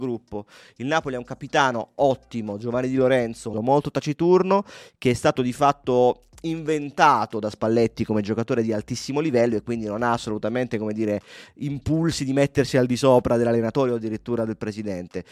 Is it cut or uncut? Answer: cut